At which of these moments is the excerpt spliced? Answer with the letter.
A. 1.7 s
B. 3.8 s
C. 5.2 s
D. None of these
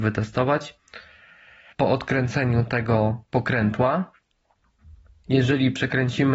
A